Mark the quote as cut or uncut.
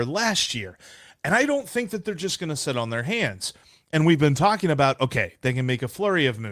uncut